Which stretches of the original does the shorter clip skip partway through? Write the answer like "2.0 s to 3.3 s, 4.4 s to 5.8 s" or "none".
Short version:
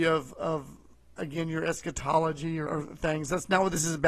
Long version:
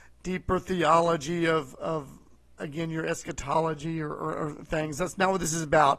4.1 s to 4.4 s

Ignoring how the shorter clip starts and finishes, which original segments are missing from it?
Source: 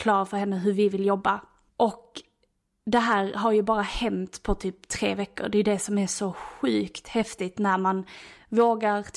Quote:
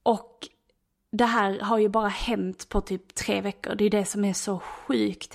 none

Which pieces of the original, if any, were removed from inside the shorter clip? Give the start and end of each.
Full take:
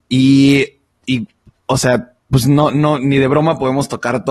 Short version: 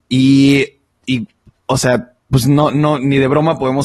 none

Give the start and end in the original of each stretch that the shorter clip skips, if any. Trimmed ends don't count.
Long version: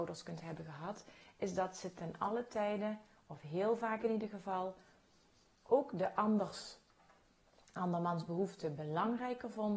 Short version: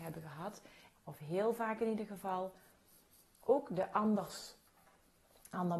1.4 s to 3.2 s

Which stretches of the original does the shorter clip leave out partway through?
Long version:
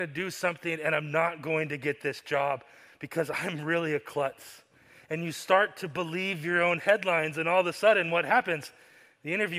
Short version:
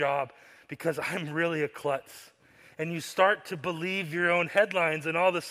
none

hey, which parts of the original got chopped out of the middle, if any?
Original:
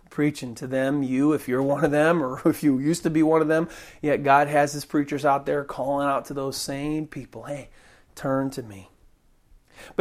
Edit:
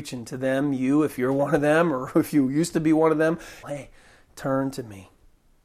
3.9 s to 7.4 s

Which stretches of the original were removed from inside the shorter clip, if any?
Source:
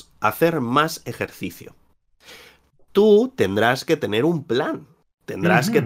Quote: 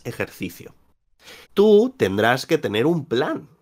2.4 s to 2.8 s

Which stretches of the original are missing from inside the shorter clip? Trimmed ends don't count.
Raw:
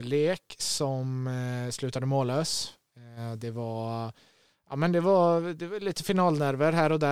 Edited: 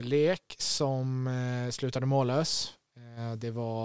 none

